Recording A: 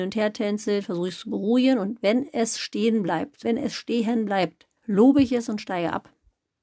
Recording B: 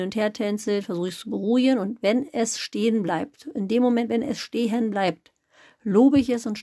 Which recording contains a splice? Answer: A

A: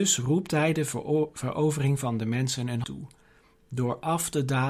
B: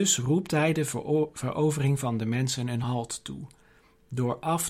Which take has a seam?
A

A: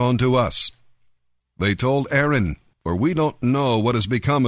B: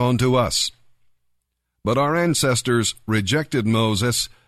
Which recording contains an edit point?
A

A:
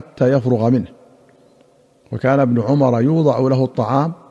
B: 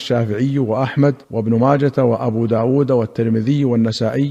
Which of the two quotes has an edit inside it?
B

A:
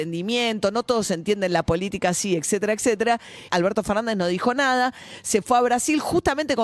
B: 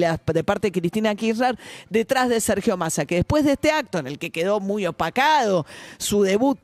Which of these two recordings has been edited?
A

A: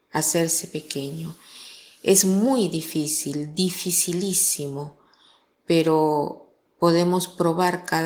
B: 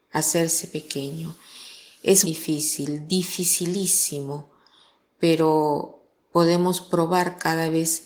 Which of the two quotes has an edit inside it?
B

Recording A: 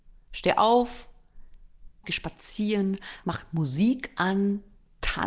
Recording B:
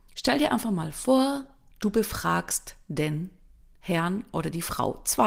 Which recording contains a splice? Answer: A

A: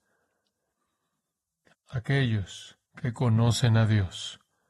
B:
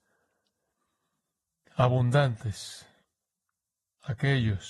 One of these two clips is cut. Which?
A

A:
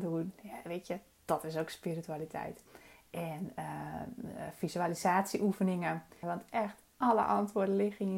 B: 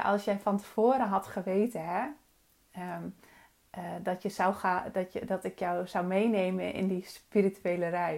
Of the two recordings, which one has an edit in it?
A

